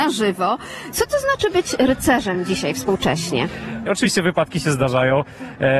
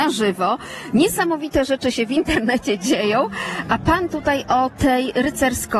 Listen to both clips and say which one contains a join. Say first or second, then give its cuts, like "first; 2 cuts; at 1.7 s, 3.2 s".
first; 2 cuts; at 0.9 s, 3.9 s